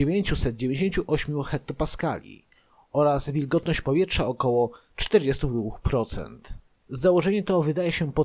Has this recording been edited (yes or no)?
yes